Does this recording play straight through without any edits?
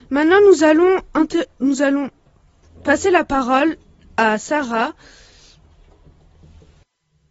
yes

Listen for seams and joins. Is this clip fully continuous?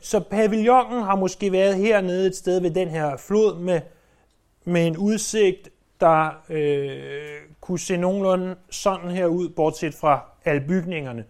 yes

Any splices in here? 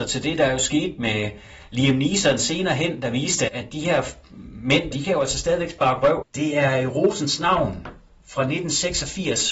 yes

